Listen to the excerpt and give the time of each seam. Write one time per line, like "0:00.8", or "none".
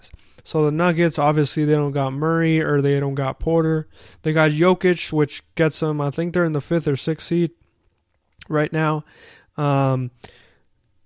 none

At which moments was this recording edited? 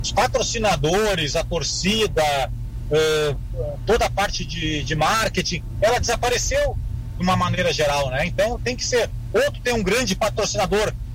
none

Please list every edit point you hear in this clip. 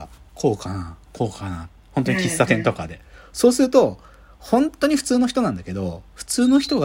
none

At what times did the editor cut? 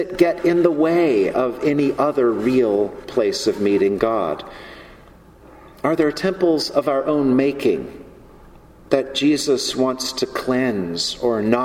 none

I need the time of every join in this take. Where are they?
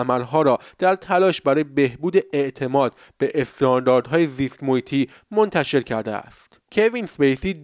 0:06.6

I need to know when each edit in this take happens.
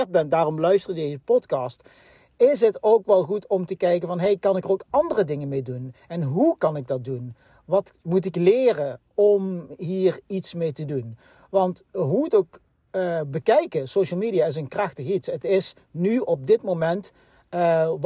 none

